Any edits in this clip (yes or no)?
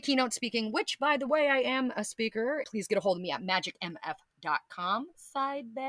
yes